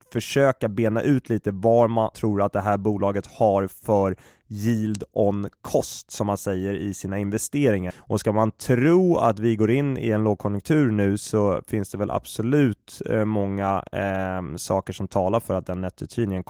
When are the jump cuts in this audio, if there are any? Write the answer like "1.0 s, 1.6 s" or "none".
2.1 s, 7.9 s